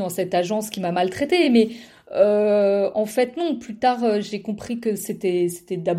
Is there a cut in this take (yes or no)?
no